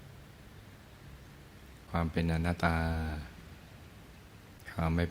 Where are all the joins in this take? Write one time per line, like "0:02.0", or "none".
0:02.6